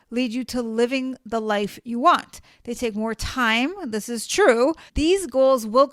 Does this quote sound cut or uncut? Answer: cut